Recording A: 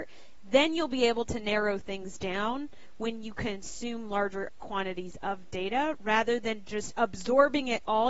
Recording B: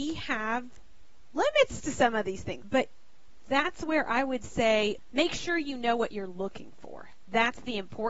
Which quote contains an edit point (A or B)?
B